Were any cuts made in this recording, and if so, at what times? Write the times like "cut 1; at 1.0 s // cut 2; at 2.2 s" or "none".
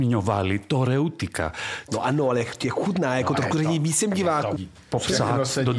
cut 1; at 1.9 s // cut 2; at 4.6 s